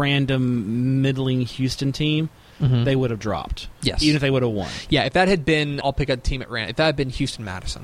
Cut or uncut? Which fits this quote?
cut